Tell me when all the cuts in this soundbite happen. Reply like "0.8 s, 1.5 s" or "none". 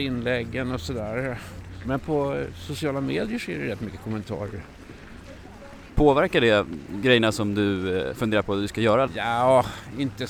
1.8 s, 9.1 s